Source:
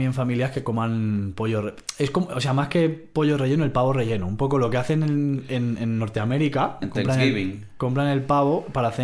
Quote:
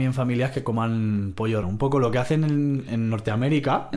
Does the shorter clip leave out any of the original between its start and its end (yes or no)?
yes